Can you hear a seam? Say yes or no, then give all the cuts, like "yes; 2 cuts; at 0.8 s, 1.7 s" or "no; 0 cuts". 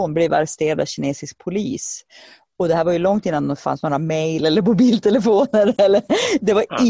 no; 0 cuts